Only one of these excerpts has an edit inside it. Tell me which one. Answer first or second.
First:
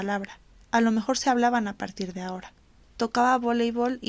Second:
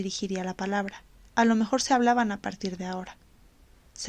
first